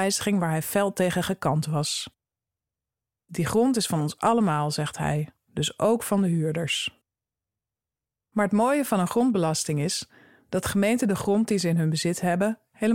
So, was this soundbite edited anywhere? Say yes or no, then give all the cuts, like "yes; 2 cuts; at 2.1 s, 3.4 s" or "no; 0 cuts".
no; 0 cuts